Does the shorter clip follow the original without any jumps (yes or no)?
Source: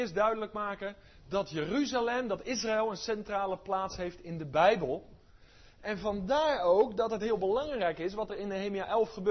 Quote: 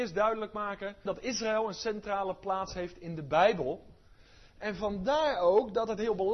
no